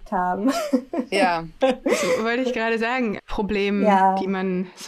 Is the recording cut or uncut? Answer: cut